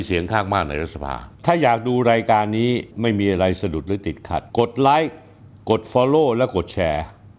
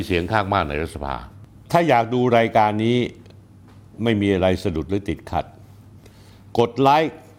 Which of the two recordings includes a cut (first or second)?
first